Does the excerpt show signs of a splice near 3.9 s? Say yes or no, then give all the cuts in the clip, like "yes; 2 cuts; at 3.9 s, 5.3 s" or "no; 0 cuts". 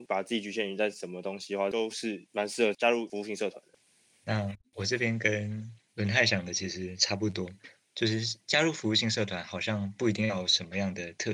no; 0 cuts